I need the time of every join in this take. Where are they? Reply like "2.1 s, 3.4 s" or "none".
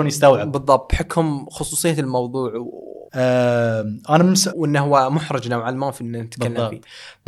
3.1 s, 4.5 s